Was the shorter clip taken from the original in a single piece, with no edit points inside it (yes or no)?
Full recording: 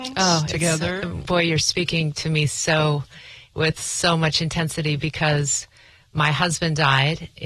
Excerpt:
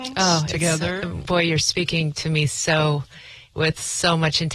yes